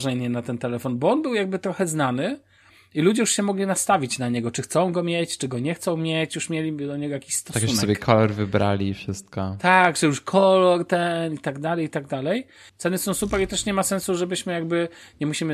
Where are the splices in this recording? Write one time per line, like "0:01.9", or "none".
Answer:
0:12.7